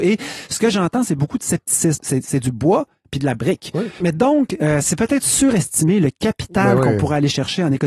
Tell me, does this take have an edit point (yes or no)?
yes